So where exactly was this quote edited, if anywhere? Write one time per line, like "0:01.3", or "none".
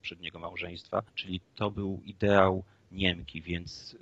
0:01.1